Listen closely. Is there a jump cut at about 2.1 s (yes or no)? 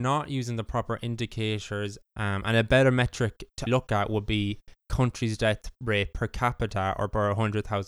yes